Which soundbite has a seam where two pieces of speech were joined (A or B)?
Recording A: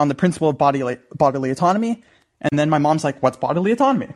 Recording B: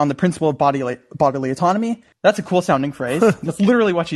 B